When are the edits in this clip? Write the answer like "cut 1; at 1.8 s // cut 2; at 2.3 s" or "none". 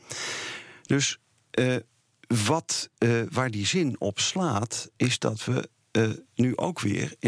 none